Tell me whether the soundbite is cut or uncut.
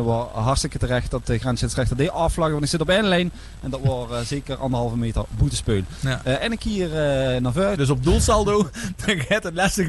cut